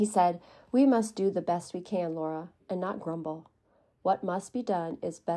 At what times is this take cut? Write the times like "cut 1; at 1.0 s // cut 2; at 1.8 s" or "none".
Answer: none